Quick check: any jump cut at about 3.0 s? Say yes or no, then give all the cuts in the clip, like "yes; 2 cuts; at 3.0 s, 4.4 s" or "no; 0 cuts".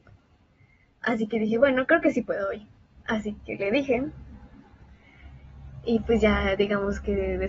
no; 0 cuts